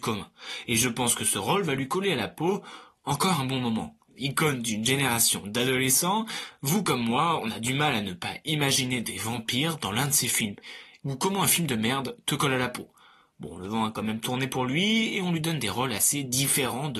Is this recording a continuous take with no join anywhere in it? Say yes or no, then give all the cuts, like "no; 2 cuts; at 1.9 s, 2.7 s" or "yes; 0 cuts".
no; 2 cuts; at 4.1 s, 11.0 s